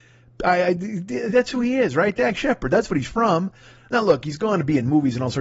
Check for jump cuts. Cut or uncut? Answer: uncut